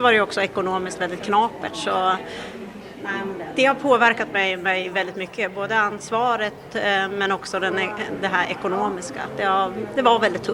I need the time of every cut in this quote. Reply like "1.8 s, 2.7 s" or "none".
none